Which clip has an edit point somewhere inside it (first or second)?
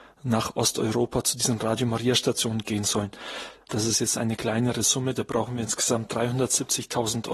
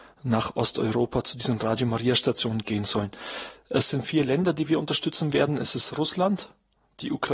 first